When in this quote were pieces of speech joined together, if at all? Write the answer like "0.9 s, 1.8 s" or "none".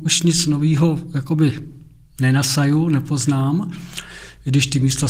none